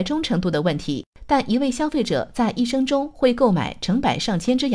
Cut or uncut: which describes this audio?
uncut